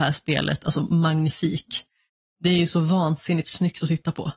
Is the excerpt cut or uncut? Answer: uncut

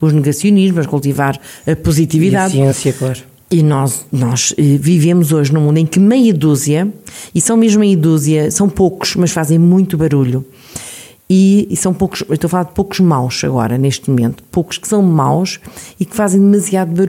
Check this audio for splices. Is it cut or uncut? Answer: uncut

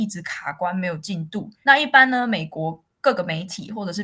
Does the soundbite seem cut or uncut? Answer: cut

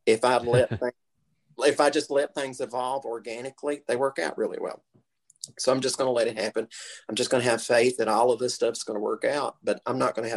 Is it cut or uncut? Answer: uncut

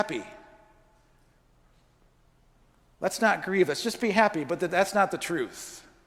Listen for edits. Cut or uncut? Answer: uncut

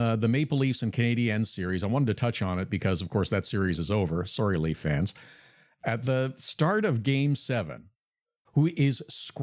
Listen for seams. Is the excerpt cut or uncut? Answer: cut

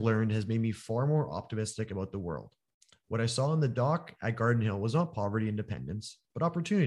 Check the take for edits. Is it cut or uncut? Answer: uncut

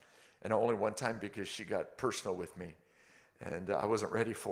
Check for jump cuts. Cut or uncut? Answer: uncut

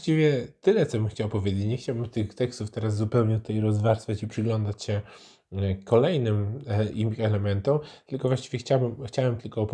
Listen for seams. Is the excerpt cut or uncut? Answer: uncut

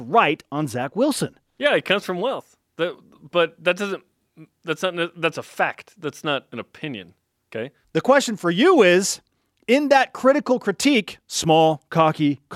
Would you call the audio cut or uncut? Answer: cut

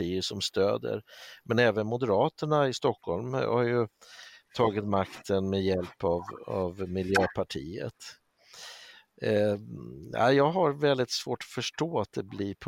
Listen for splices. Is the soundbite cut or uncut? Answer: uncut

